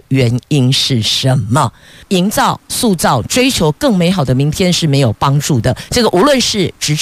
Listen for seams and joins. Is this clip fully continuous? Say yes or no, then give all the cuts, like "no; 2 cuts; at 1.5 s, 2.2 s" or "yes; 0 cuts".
no; 2 cuts; at 2.0 s, 5.9 s